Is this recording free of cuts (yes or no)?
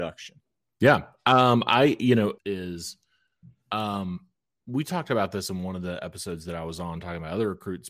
no